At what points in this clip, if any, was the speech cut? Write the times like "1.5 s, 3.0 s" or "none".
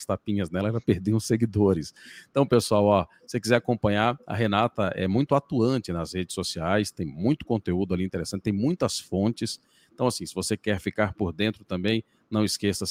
none